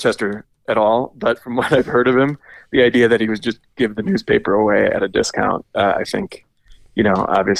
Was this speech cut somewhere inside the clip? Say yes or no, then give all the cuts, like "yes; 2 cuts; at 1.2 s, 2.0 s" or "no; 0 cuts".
no; 0 cuts